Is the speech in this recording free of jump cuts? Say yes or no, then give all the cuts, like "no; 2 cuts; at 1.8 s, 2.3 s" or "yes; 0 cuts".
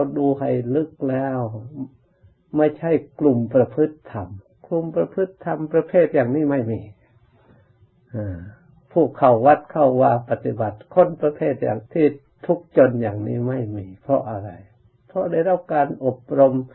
no; 1 cut; at 11.9 s